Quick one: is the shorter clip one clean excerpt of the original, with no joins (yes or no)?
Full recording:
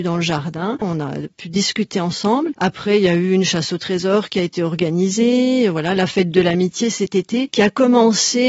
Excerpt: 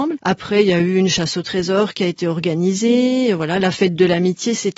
yes